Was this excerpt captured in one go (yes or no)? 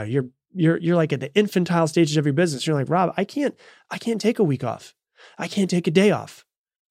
yes